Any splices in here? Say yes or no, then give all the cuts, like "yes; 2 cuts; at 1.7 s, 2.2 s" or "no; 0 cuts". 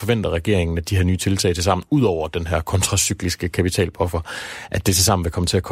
no; 0 cuts